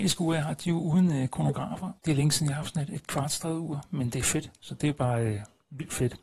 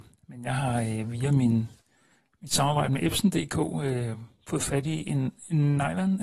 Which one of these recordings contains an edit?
first; 2 cuts; at 2.0 s, 4.6 s

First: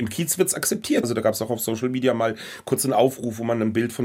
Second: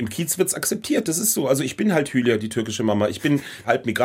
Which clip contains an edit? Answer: first; 1 cut; at 1.0 s

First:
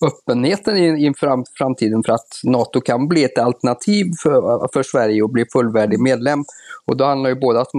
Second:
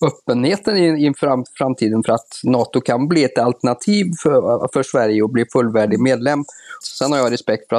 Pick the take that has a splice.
second; 1 cut; at 6.8 s

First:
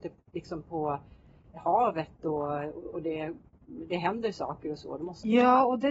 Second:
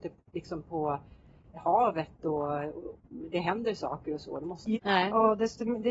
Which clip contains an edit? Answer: second; 2 cuts; at 2.9 s, 4.7 s

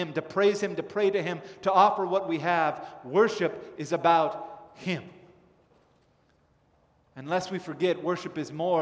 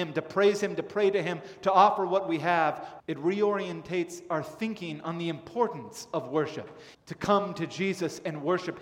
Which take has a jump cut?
second; 2 cuts; at 3.0 s, 6.9 s

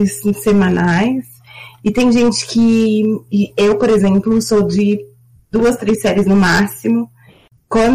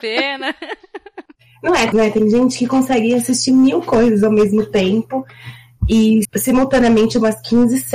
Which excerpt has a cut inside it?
second; 2 cuts; at 1.9 s, 6.2 s

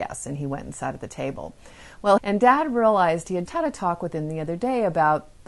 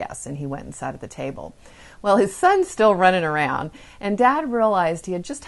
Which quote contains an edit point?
first; 2 cuts; at 2.2 s, 3.5 s

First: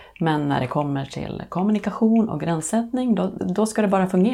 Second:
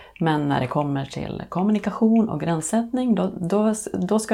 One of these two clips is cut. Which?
first; 1 cut; at 3.4 s

